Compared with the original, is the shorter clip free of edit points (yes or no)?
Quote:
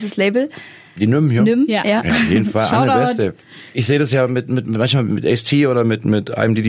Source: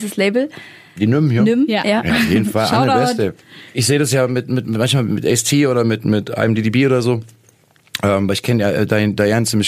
yes